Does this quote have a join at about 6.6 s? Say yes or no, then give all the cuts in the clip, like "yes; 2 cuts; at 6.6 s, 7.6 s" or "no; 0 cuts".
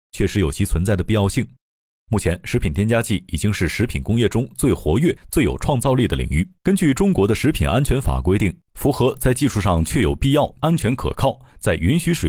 yes; 2 cuts; at 6.6 s, 10.6 s